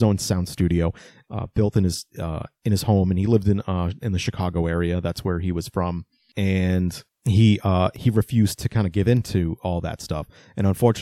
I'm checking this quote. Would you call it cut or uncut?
uncut